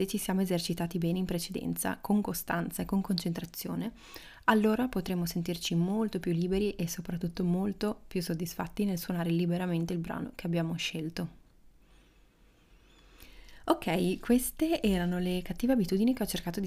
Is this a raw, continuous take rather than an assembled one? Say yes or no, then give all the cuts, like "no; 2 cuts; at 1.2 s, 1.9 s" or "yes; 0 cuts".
yes; 0 cuts